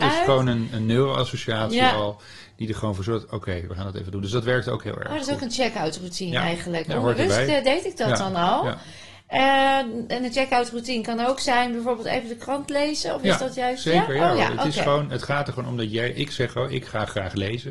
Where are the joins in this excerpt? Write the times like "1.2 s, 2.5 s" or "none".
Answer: 3.7 s